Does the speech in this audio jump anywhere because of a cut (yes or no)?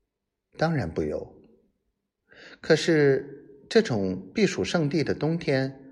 no